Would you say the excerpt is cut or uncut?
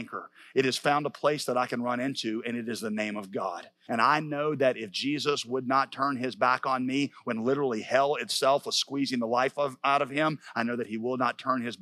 cut